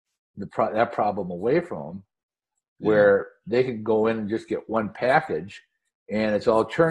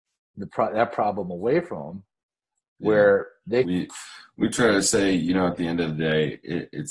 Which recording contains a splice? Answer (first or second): second